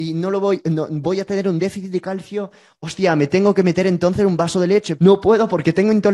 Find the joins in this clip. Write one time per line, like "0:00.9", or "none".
0:05.0